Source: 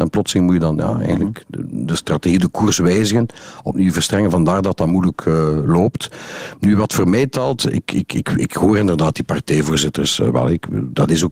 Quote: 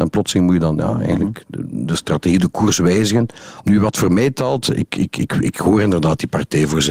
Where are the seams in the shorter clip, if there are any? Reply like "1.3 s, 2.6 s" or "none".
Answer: 3.6 s